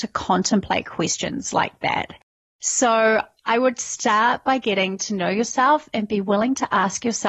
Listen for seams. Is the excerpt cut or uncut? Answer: uncut